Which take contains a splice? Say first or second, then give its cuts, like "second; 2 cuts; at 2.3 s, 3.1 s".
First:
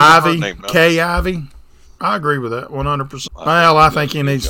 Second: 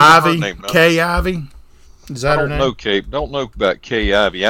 first; 2 cuts; at 2.0 s, 3.3 s